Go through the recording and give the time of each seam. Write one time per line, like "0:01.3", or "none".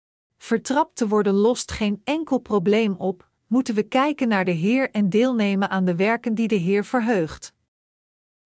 0:03.4

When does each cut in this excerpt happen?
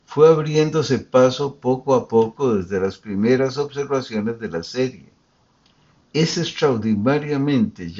0:06.0

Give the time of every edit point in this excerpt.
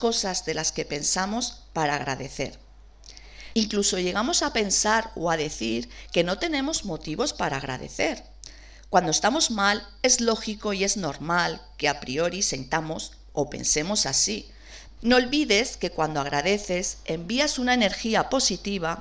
0:03.5
0:15.0

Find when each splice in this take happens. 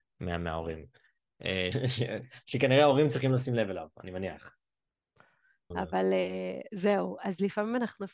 0:01.7
0:05.7

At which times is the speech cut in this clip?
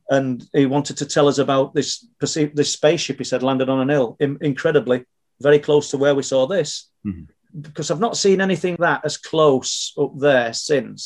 0:07.5
0:08.8

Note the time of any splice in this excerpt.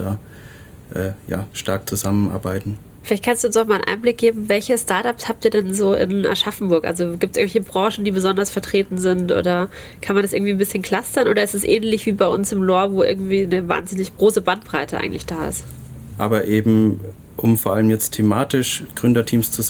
0:16.1

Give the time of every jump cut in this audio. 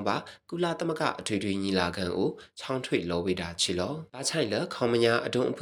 0:04.1

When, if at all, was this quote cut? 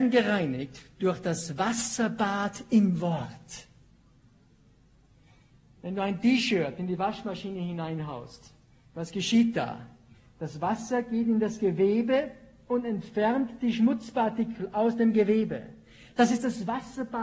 none

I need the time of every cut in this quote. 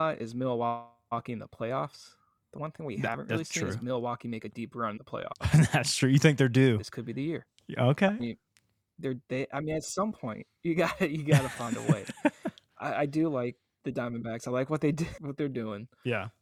0:15.2

